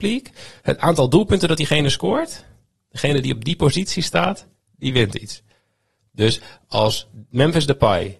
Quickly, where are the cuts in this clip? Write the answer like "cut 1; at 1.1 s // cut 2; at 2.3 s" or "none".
none